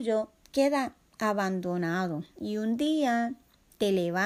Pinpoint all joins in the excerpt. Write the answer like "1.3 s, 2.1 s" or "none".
2.3 s

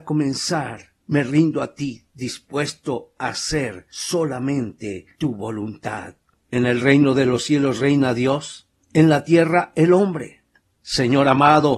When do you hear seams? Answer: 6.4 s, 10.6 s

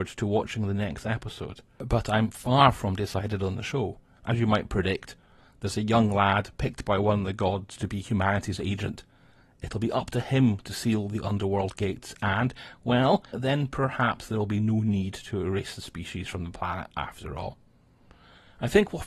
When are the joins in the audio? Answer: 4.2 s, 13.3 s

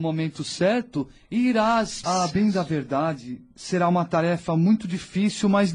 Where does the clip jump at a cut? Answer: 2.0 s

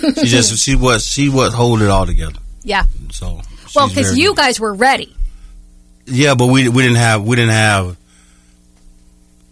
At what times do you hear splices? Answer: none

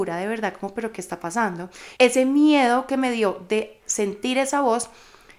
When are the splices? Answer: 2.0 s

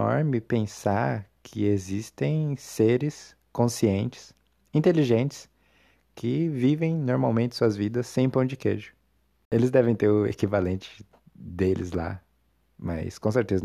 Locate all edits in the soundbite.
none

